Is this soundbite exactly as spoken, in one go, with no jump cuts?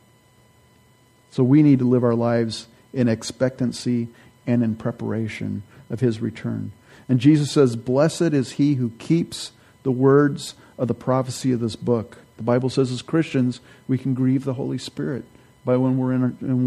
no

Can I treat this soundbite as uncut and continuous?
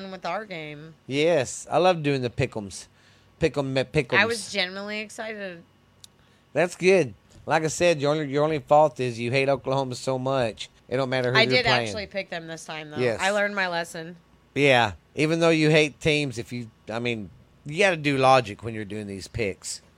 no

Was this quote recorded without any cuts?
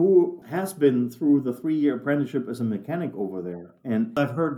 yes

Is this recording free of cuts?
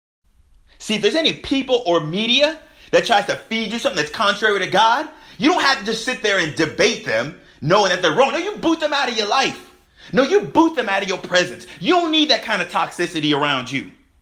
yes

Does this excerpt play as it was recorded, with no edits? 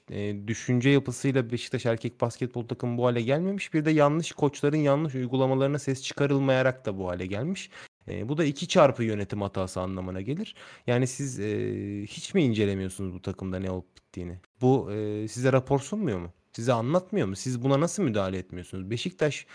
no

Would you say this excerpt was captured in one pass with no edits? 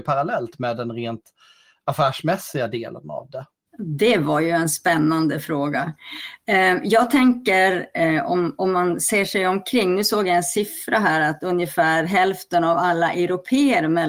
yes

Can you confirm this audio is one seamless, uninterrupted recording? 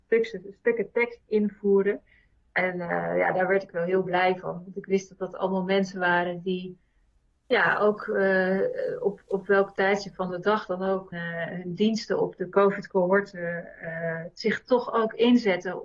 no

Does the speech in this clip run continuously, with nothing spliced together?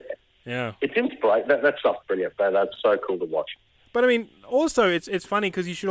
yes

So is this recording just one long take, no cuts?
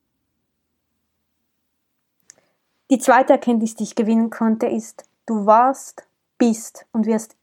yes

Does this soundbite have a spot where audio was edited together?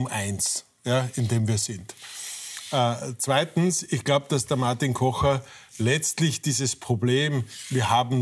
no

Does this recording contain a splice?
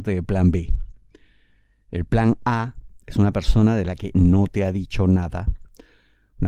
no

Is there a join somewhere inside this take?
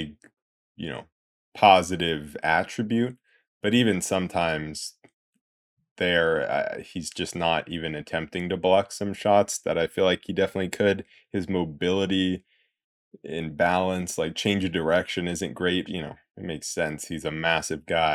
yes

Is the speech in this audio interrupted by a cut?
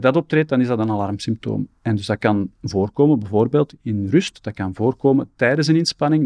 no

